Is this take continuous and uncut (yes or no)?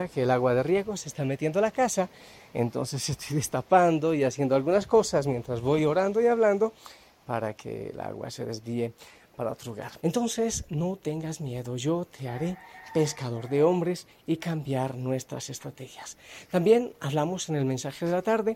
no